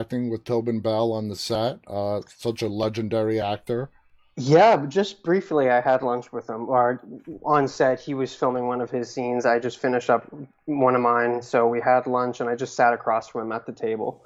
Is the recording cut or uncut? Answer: uncut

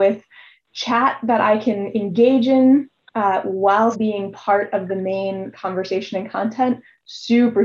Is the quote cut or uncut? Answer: cut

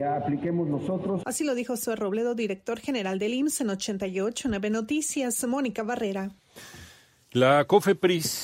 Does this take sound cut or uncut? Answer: uncut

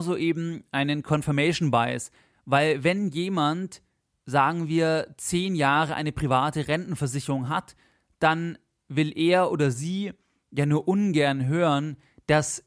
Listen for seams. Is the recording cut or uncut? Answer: uncut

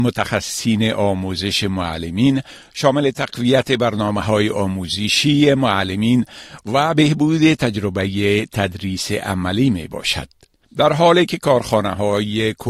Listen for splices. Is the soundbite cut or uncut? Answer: cut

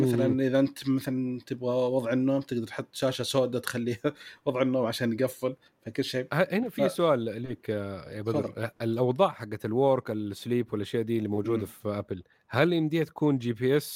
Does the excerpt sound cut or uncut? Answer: uncut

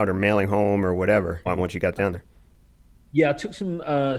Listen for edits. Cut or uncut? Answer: cut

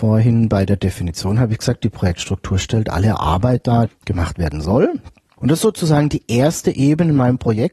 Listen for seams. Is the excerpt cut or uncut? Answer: cut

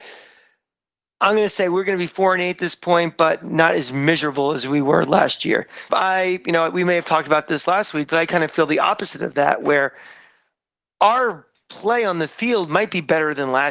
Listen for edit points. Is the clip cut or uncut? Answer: cut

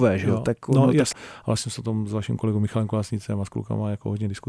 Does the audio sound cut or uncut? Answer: cut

